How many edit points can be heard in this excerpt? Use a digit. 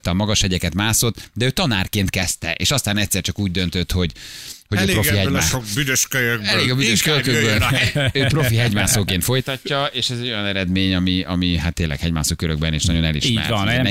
0